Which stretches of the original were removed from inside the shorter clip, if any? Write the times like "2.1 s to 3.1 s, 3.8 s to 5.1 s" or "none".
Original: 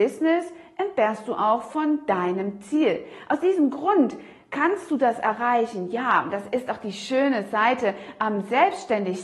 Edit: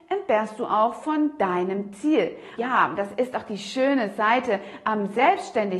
3.2 s to 5.9 s